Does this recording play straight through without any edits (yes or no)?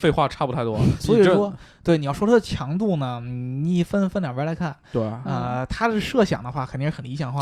no